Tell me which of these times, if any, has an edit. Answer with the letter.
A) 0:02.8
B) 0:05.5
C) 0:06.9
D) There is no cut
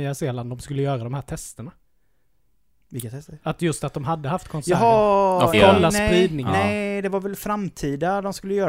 B